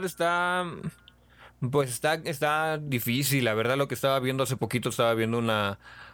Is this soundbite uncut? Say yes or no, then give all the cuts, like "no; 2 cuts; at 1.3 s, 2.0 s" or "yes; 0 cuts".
yes; 0 cuts